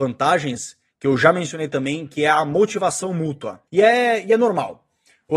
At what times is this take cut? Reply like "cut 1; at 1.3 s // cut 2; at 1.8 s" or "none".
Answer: cut 1; at 3.7 s